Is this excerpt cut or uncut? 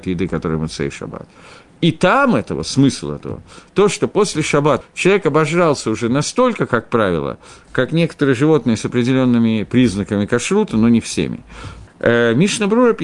cut